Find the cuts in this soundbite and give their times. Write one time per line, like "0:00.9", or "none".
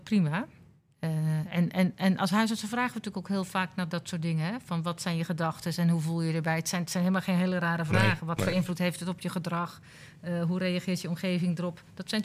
none